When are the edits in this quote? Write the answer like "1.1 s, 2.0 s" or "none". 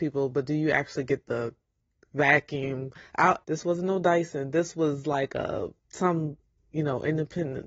3.4 s, 5.8 s

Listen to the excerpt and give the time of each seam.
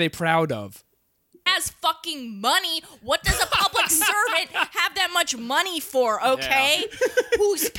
1.5 s

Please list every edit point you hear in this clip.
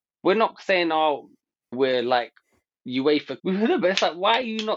1.7 s, 3.4 s

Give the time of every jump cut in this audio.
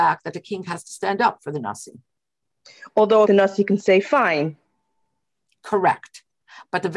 3.2 s

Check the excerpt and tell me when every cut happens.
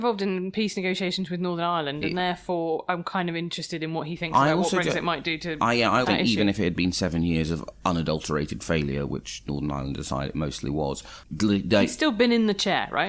6.0 s, 11.3 s

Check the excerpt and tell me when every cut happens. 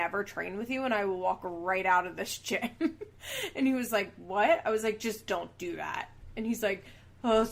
none

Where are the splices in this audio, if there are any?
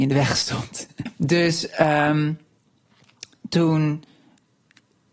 1.1 s

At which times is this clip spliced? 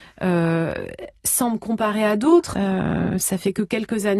2.5 s

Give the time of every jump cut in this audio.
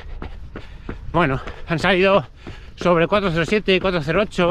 1.1 s

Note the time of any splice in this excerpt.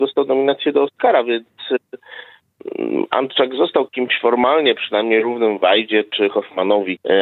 none

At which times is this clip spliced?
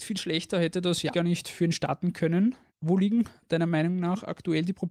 1.1 s, 2.7 s

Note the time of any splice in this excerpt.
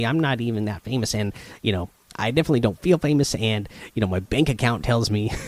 none

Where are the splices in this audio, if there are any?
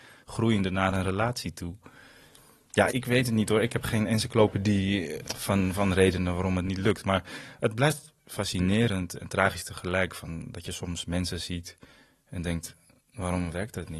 2.9 s

